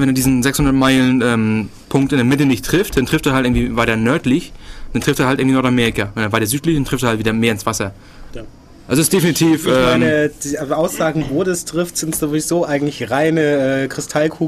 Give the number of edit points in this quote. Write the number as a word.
one